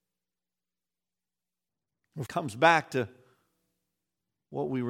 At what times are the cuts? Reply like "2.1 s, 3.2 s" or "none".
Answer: 2.3 s